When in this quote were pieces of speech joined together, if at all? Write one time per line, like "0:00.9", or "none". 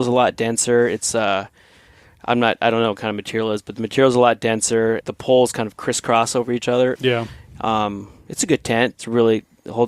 0:05.0
0:07.0
0:08.9